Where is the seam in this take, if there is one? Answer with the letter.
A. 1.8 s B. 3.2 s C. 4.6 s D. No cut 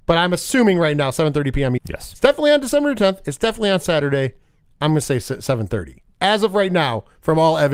A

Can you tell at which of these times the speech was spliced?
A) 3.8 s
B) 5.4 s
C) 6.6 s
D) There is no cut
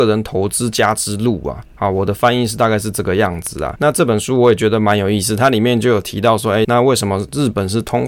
C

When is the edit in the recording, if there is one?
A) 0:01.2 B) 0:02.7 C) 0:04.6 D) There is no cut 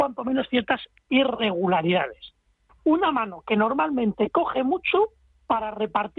B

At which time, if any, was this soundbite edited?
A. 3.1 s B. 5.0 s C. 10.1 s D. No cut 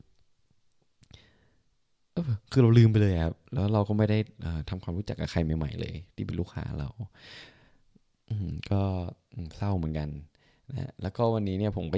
D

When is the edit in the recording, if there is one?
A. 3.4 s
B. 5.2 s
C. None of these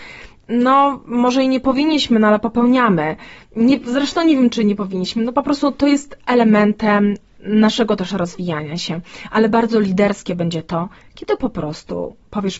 C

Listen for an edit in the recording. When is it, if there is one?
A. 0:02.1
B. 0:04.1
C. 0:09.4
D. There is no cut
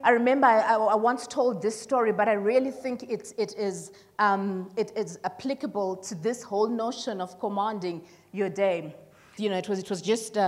C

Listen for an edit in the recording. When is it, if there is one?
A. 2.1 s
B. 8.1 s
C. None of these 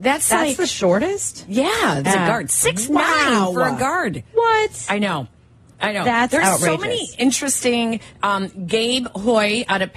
A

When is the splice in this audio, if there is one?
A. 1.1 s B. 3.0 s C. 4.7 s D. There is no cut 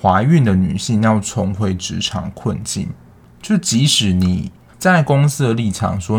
C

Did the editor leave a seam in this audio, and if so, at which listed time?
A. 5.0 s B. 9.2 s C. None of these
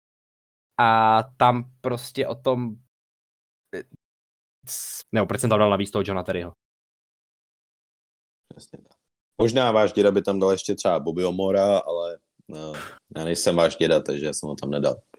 A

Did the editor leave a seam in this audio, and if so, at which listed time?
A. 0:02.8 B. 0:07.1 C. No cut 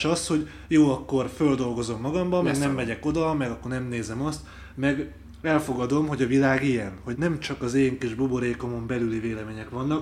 B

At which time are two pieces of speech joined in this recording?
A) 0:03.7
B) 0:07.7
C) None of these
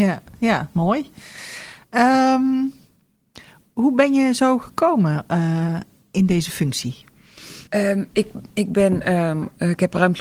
B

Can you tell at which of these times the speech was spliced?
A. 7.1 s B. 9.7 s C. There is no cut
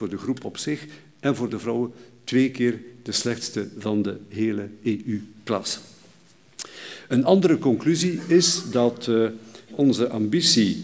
B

